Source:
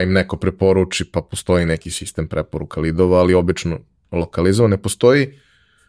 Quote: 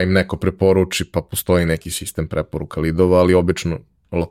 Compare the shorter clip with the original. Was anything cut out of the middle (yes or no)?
no